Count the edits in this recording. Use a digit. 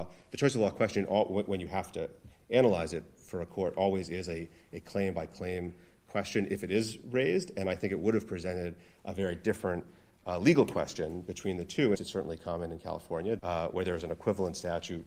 2